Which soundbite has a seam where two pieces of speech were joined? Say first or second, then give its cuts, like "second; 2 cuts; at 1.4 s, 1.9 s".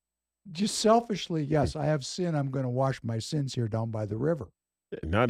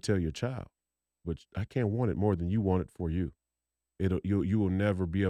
second; 2 cuts; at 1.2 s, 3.9 s